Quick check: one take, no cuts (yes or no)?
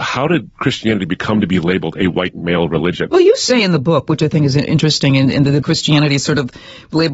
no